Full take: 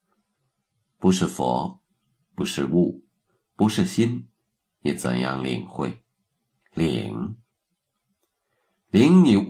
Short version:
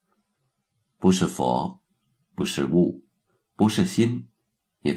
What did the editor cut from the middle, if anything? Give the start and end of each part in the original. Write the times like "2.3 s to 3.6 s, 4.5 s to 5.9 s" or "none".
none